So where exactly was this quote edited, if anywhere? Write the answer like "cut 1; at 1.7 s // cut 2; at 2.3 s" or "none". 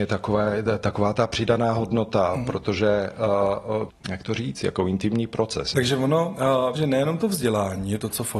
cut 1; at 3.9 s // cut 2; at 5.7 s // cut 3; at 6.7 s